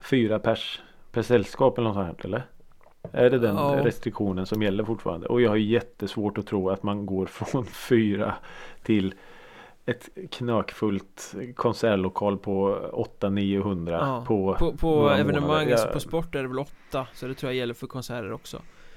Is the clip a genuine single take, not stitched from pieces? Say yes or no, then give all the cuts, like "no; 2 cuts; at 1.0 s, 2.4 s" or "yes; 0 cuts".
yes; 0 cuts